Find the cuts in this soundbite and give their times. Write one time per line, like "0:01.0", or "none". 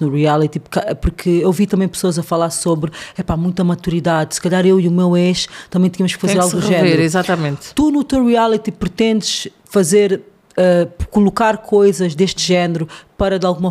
none